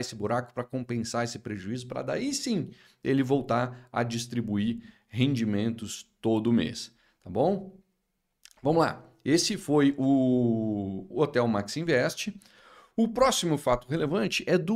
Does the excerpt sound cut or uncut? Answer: uncut